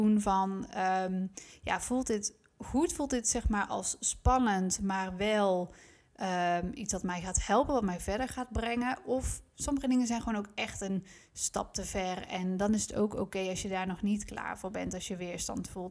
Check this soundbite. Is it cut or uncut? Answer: uncut